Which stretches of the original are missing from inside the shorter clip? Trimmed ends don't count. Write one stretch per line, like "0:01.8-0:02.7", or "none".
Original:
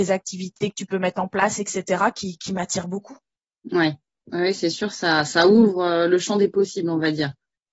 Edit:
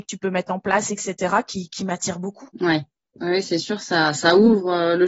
0:03.2-0:03.6